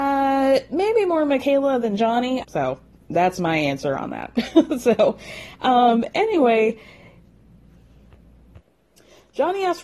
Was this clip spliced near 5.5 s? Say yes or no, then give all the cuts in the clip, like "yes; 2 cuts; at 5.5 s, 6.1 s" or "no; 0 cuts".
no; 1 cut; at 2.4 s